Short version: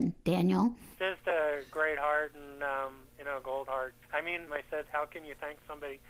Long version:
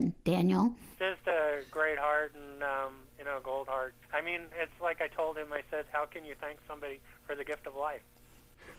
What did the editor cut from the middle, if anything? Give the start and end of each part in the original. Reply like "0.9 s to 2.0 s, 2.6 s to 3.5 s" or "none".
4.5 s to 5.5 s

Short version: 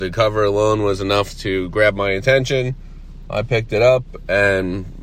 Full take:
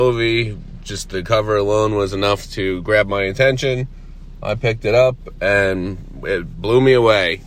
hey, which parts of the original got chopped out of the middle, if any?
none

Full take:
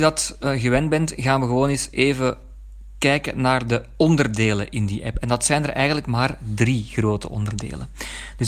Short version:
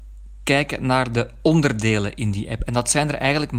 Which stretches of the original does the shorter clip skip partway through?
none

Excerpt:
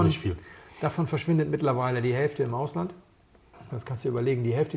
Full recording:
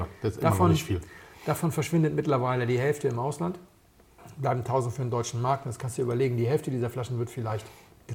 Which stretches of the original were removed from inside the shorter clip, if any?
4.3 s to 5.6 s

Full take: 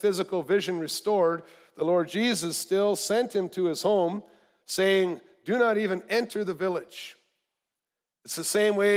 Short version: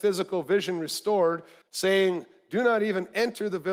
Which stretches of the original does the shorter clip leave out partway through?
1.6 s to 4.6 s

